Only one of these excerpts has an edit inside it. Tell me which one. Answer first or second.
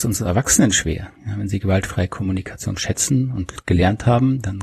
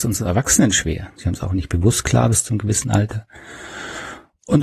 second